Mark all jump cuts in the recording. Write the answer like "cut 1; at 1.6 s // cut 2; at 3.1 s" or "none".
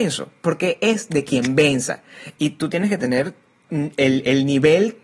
none